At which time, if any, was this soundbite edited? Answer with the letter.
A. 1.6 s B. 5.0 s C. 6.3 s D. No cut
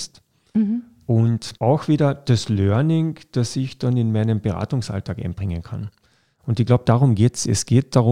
A